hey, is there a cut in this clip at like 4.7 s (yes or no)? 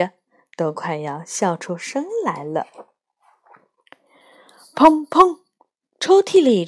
no